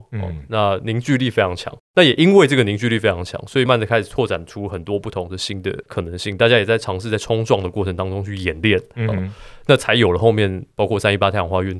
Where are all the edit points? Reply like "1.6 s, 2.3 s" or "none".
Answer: 3.7 s